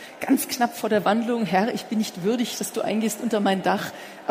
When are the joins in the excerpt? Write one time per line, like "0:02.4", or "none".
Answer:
none